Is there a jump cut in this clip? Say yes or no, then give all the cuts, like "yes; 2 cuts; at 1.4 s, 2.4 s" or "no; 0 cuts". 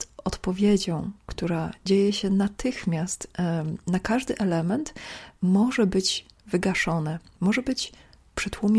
no; 0 cuts